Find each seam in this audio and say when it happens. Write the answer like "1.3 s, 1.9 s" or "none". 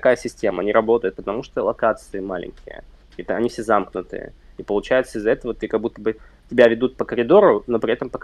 none